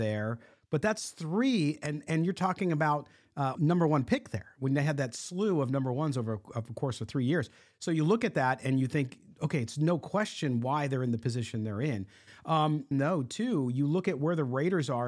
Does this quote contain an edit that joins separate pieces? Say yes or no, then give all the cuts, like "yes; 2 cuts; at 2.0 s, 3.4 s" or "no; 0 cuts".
yes; 2 cuts; at 3.5 s, 12.9 s